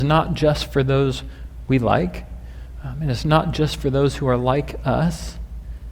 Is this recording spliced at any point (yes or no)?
no